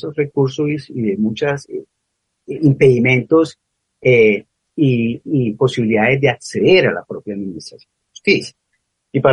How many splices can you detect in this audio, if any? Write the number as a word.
one